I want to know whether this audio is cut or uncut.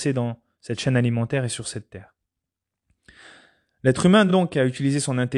uncut